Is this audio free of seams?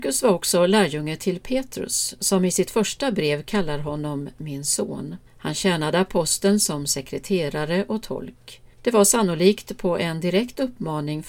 no; 2 cuts; at 5.3 s, 8.7 s

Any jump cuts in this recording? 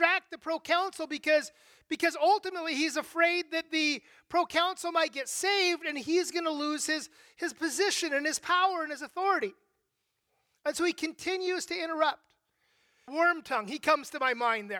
yes; 1 cut; at 13.1 s

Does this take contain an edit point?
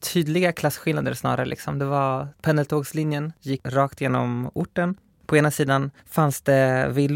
no; 0 cuts

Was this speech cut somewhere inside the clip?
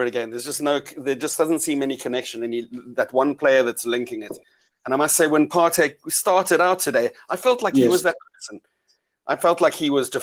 no; 0 cuts

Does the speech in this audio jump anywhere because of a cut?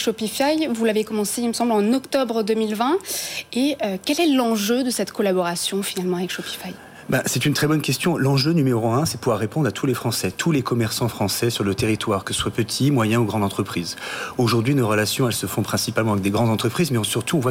no; 0 cuts

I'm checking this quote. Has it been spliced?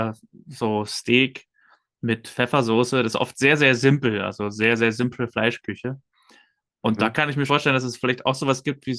yes; 1 cut; at 7.5 s

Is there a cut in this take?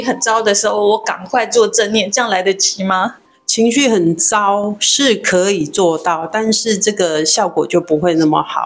no; 0 cuts

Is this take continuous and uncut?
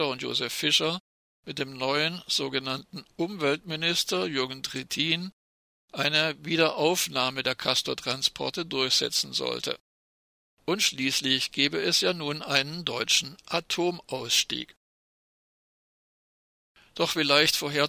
no; 1 cut; at 10.6 s

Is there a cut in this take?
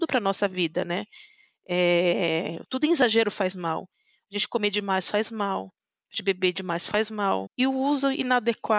yes; 1 cut; at 7.5 s

